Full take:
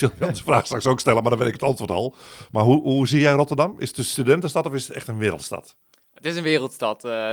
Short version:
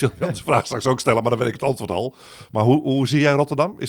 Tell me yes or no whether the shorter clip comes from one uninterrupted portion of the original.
yes